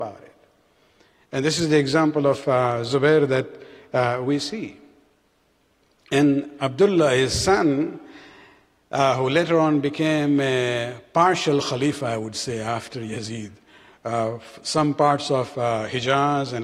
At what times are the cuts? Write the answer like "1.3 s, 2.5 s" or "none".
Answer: none